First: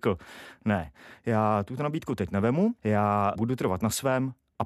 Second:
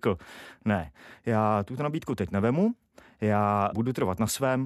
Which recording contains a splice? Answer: first; 1 cut; at 2.8 s

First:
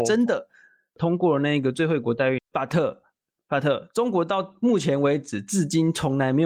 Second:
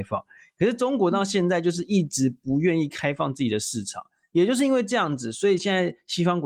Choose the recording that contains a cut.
first; 1 cut; at 2.4 s

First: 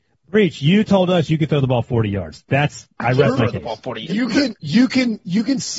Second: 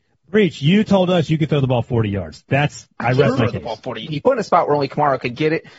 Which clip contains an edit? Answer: second; 1 cut; at 4.1 s

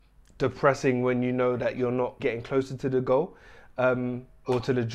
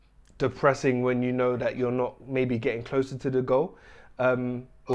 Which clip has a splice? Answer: first; 1 cut; at 2.2 s

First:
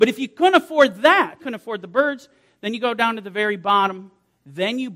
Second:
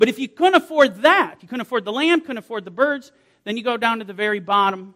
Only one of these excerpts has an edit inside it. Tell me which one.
first; 1 cut; at 1.4 s

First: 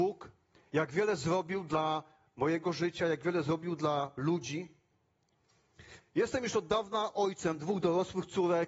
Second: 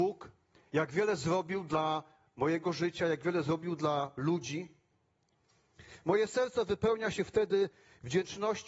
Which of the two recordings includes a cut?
first; 1 cut; at 6.0 s

